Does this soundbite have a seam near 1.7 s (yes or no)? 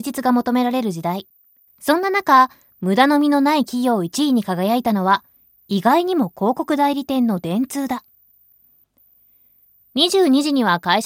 yes